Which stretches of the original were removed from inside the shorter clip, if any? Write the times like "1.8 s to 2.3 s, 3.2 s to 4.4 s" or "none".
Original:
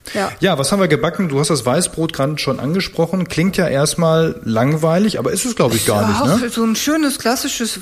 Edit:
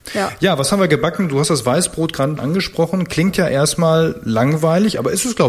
2.4 s to 2.6 s